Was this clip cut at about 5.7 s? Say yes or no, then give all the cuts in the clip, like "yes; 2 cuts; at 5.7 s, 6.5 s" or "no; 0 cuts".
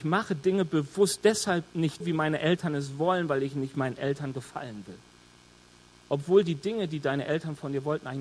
no; 1 cut; at 2.0 s